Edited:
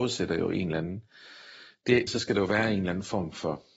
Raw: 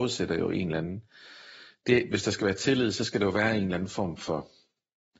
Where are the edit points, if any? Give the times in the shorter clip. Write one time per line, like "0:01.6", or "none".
0:02.1